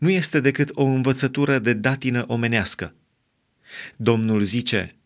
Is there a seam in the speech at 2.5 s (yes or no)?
no